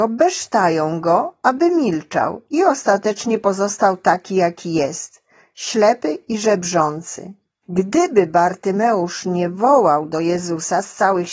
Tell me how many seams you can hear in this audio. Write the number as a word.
zero